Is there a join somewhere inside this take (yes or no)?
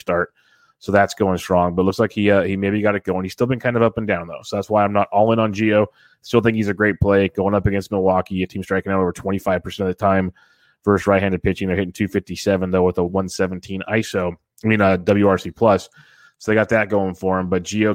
no